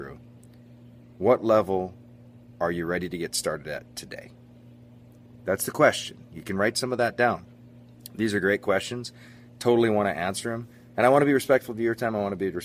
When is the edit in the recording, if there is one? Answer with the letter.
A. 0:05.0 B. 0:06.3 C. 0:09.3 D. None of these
D